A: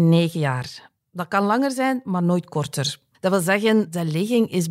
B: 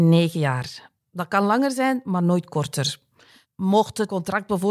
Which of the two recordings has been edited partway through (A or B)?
A